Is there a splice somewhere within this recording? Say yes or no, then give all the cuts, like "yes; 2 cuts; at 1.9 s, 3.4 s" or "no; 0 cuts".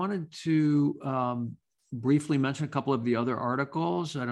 no; 0 cuts